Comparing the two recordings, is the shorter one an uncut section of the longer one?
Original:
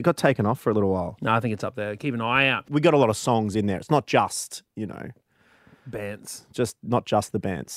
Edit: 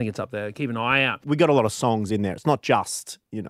yes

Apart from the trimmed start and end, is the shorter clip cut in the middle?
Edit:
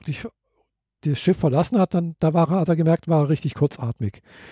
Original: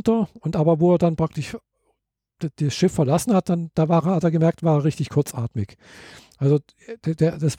yes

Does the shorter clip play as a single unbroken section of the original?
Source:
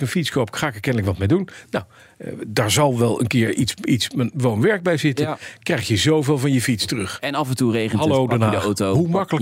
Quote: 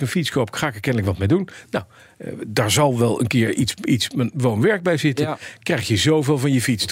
yes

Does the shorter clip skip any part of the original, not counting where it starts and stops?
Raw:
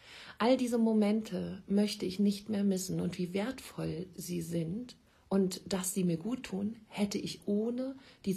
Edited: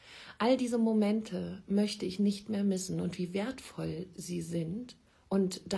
no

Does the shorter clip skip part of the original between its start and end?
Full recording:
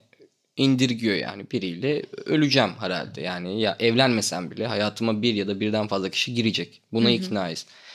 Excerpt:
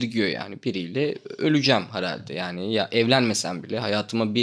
no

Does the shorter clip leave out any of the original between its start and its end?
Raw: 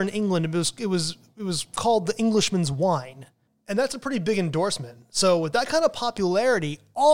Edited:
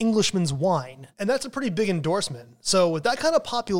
yes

